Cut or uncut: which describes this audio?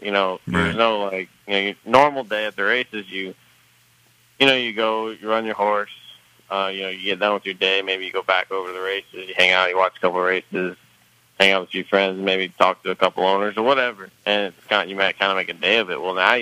cut